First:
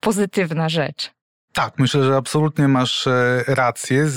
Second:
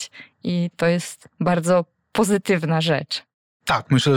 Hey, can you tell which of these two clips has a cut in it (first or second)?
second